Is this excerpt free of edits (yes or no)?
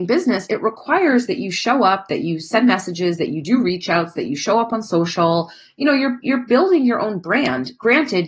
yes